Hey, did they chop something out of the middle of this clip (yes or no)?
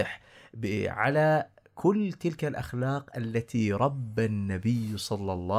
no